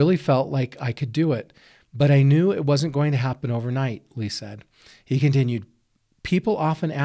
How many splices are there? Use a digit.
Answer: 0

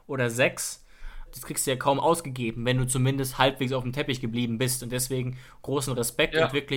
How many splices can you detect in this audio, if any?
1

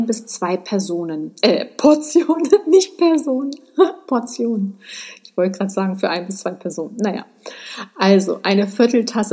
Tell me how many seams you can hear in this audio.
0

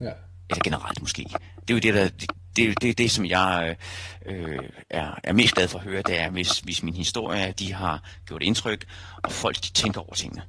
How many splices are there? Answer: 0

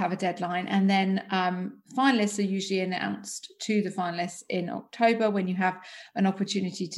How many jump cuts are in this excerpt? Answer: 0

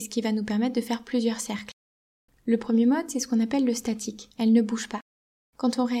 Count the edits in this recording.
2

